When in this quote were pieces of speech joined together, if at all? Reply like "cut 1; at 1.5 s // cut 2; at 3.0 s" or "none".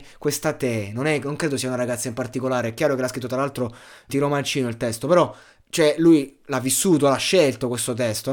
cut 1; at 4.1 s